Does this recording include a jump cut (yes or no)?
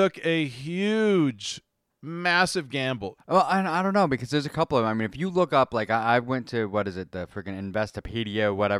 yes